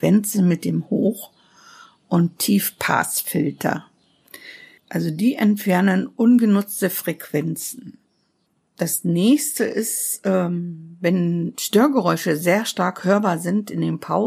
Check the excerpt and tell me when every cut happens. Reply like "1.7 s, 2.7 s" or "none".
none